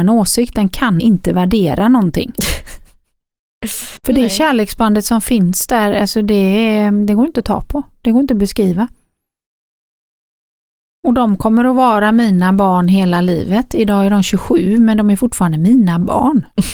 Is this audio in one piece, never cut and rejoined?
no; 2 cuts; at 1.0 s, 4.0 s

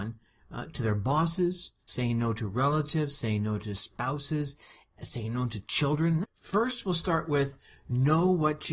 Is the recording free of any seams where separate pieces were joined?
no; 1 cut; at 6.2 s

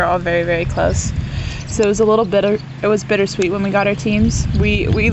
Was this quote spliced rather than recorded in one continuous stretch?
no; 0 cuts

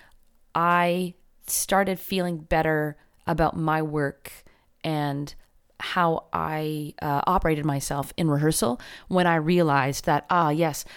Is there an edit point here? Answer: no; 0 cuts

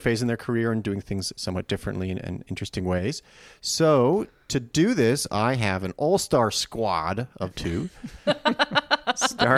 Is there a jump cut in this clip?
no; 0 cuts

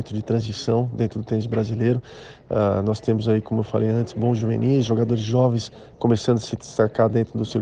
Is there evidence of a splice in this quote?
no; 0 cuts

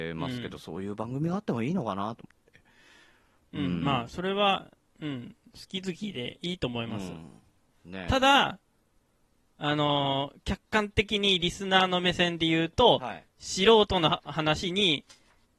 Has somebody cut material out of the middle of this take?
no; 0 cuts

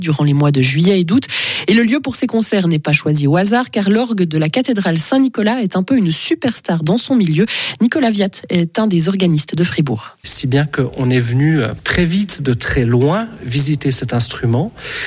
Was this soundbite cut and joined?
yes; 1 cut; at 10.2 s

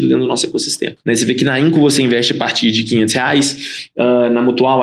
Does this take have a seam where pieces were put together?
yes; 1 cut; at 1.0 s

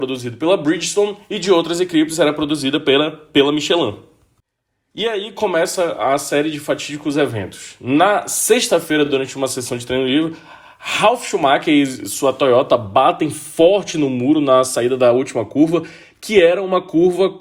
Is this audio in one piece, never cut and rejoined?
yes; 0 cuts

